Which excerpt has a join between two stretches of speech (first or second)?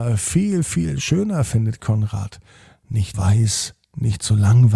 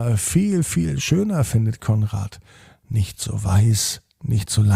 first